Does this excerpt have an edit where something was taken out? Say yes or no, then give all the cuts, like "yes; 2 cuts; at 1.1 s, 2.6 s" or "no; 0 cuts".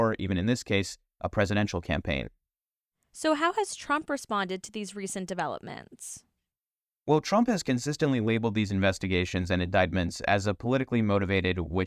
no; 0 cuts